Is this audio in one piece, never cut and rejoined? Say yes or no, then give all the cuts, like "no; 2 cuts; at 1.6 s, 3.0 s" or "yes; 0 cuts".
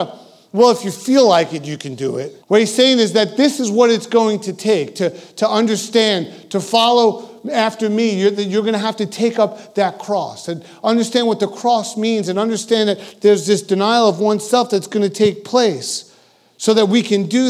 no; 1 cut; at 2.4 s